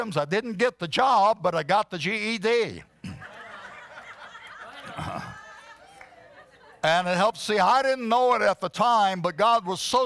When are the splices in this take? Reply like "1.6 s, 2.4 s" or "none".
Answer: none